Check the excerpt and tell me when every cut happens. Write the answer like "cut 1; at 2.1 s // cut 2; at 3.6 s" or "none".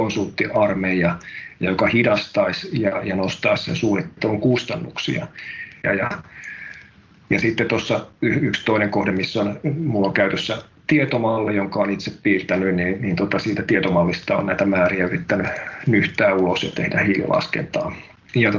cut 1; at 5.8 s